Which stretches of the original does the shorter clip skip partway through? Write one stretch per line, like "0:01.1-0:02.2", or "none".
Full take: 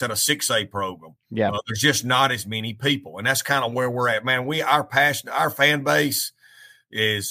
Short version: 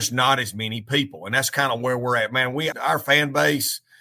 0:04.6-0:05.2

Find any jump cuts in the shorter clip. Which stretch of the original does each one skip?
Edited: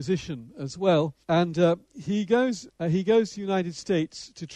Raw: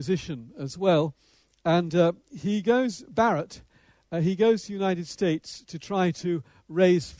0:01.2-0:01.6
0:03.1-0:04.0

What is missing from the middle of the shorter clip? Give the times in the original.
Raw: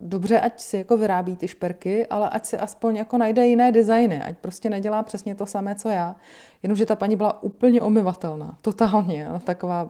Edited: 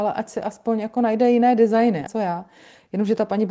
0:04.2-0:05.8

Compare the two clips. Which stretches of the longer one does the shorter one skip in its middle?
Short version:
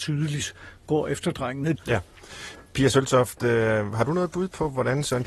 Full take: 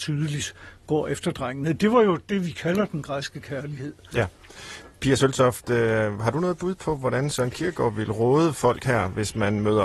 0:01.7-0:04.0

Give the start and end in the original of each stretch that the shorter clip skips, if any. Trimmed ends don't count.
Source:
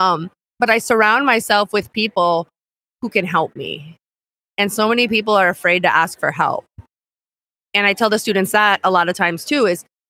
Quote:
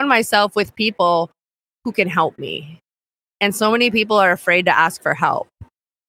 none

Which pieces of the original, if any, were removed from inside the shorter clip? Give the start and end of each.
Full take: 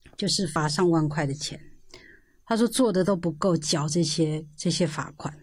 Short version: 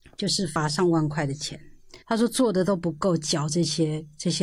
0:02.0-0:02.4

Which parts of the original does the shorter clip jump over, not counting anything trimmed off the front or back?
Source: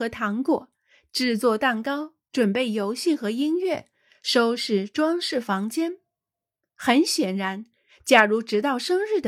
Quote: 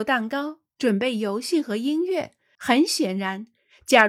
0:04.1-0:06.7

